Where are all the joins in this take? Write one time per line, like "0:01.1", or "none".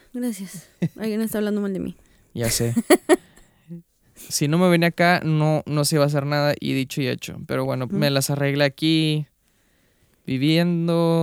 0:07.9